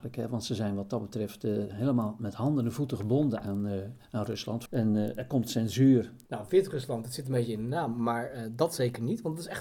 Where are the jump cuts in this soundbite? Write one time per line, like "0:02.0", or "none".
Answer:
0:04.7
0:06.3

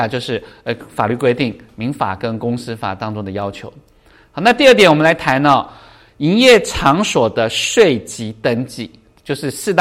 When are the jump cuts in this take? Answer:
none

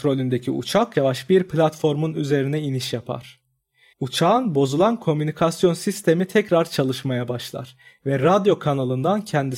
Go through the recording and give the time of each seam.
0:00.9
0:03.9

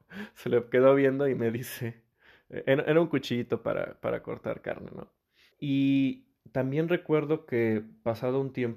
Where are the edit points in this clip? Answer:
0:05.5

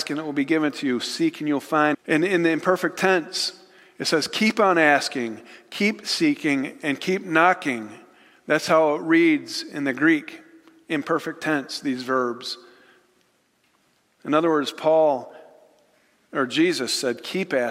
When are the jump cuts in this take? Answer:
0:01.9

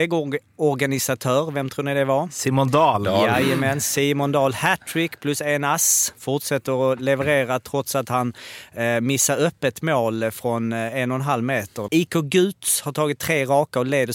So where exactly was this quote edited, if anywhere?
0:11.9

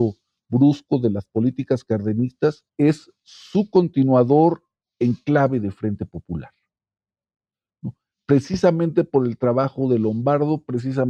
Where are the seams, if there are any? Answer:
0:02.7

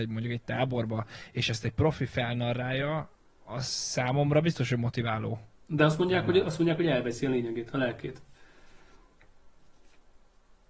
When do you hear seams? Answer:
none

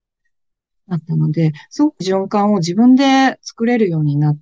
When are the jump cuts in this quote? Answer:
0:02.0

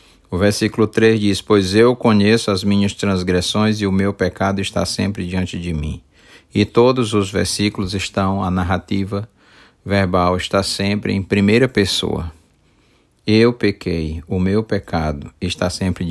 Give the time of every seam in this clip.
none

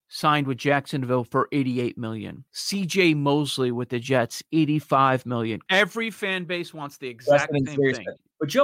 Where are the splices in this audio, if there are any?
0:02.5
0:05.7

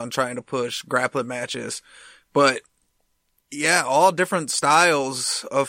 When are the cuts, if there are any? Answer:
none

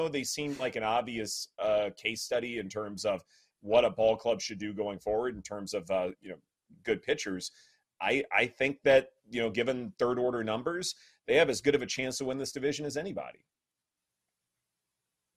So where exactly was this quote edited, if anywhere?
0:06.1
0:08.0

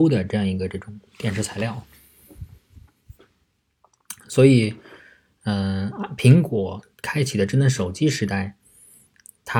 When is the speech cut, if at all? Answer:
none

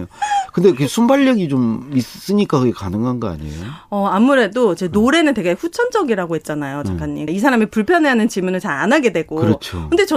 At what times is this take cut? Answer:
0:07.3

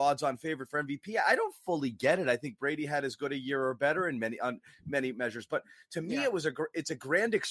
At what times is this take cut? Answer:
none

